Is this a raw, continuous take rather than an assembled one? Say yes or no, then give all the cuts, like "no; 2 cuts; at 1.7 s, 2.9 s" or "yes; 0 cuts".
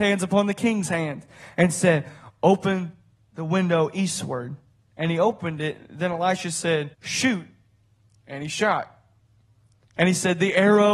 no; 1 cut; at 6.9 s